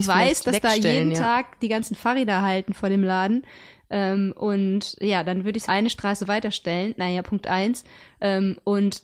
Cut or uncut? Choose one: cut